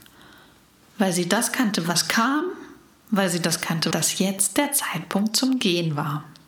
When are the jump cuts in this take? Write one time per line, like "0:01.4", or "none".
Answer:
0:03.9